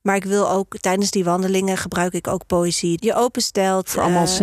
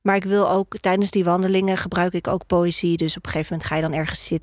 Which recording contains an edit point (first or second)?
first